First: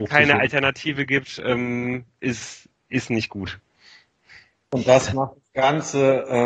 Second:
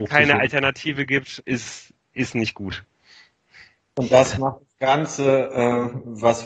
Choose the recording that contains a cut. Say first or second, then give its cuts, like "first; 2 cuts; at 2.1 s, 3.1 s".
second; 1 cut; at 1.4 s